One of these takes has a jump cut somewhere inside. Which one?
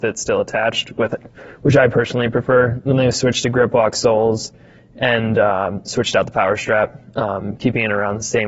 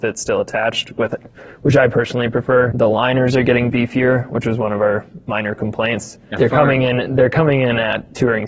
second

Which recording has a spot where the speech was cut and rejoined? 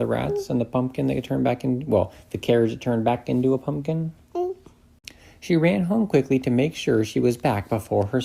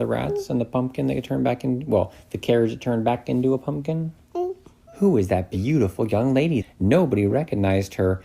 second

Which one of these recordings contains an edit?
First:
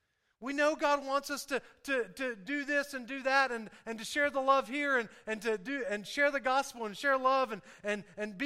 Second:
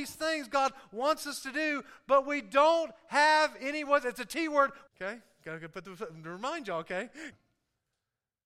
second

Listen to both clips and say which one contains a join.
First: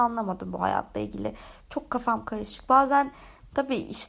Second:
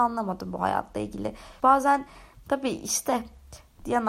second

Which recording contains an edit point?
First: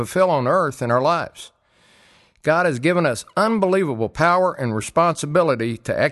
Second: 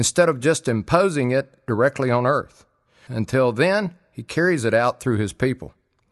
second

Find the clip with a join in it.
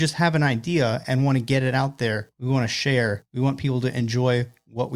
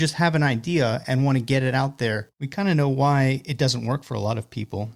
second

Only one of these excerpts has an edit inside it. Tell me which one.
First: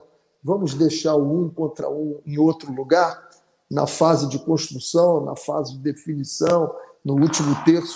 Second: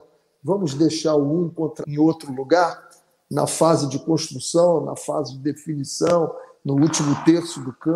second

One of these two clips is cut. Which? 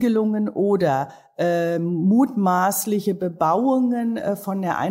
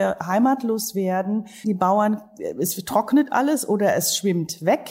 second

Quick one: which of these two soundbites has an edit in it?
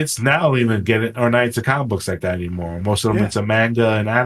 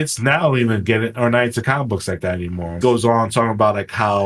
second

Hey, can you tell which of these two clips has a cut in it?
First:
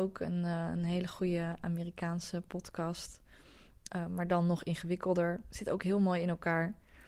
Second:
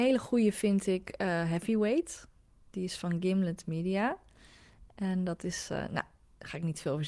first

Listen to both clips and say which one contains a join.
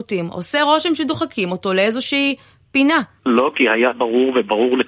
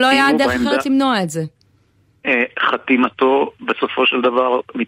first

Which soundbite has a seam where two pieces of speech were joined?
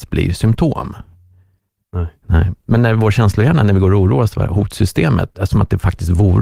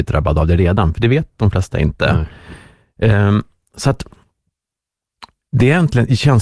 first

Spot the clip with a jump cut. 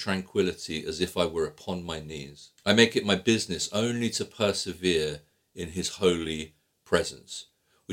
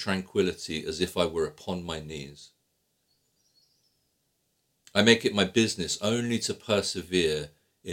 first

